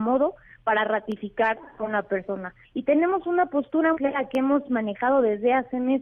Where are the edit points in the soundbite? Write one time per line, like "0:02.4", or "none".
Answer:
0:02.6
0:03.9